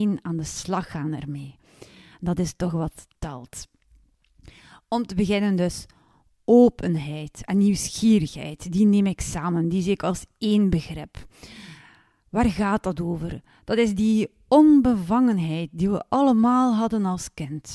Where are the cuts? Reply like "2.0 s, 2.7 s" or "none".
none